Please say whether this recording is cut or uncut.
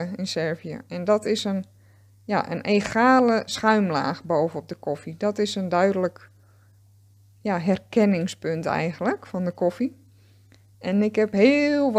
uncut